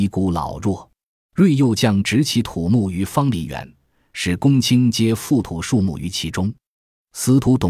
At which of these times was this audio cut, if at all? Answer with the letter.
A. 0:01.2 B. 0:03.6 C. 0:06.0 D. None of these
A